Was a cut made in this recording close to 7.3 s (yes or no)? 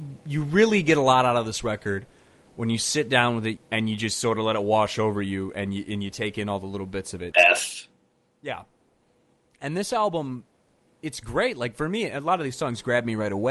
yes